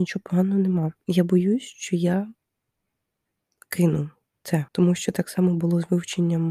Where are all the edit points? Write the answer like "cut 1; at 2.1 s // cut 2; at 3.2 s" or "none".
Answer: cut 1; at 1.0 s // cut 2; at 4.7 s